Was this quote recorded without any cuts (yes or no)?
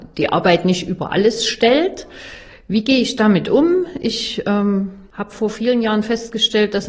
yes